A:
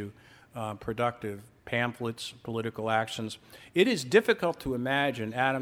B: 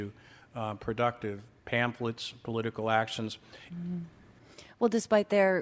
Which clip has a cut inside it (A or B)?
B